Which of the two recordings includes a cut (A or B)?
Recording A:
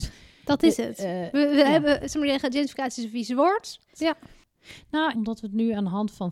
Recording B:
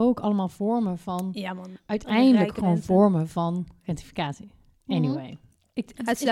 A